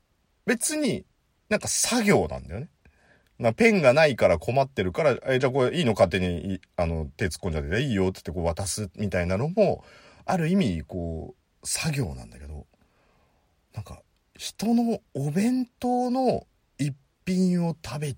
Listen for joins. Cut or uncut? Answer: uncut